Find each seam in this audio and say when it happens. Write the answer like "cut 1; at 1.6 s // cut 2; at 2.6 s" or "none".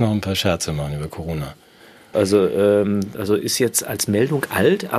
cut 1; at 2.1 s // cut 2; at 3.1 s